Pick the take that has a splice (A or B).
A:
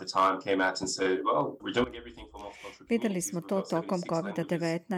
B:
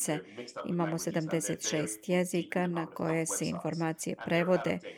A